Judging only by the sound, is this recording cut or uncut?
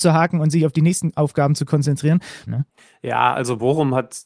cut